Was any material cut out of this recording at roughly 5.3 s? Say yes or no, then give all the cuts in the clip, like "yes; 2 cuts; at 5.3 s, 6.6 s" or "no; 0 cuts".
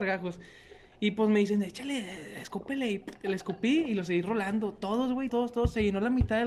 yes; 1 cut; at 5.3 s